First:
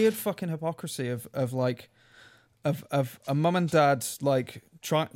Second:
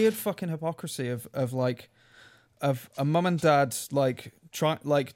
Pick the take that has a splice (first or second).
second